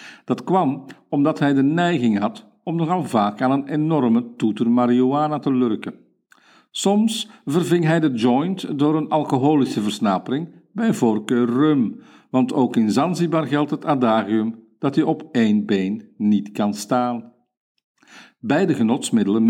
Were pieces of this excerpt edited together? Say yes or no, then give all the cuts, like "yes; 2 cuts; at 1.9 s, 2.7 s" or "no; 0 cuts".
no; 0 cuts